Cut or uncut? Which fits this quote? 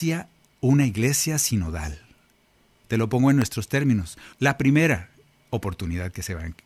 cut